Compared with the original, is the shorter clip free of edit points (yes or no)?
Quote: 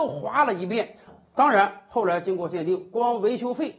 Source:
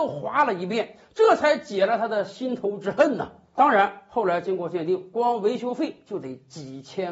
no